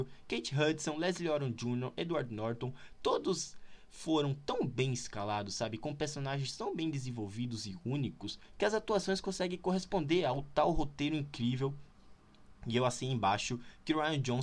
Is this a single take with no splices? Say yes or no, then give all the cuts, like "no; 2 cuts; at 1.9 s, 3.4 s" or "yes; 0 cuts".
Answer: yes; 0 cuts